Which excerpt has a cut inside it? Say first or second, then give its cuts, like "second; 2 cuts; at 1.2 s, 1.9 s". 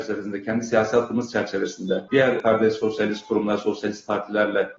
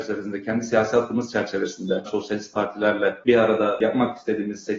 second; 1 cut; at 2.1 s